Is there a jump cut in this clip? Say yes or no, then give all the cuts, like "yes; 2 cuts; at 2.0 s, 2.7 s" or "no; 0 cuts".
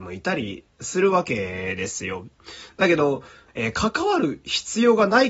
yes; 1 cut; at 3.5 s